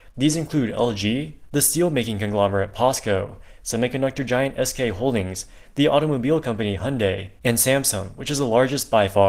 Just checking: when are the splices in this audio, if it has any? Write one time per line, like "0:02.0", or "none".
none